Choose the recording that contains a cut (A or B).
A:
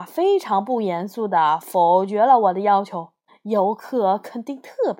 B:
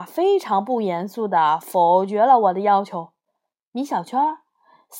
A